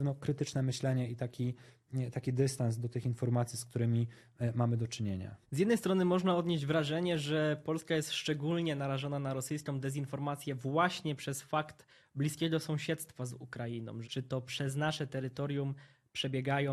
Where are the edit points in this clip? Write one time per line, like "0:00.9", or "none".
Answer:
0:05.4
0:14.0